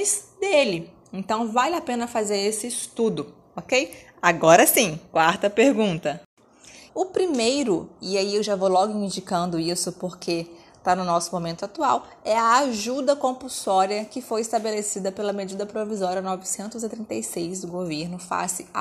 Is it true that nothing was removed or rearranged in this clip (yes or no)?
no